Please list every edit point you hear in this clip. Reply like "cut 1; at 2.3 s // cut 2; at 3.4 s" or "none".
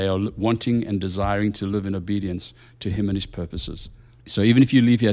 cut 1; at 4.2 s